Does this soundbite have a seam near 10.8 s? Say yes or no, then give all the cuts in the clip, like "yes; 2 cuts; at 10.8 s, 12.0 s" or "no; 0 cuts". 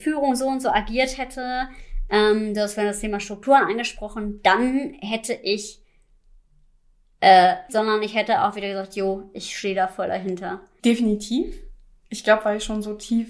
yes; 2 cuts; at 7.7 s, 10.8 s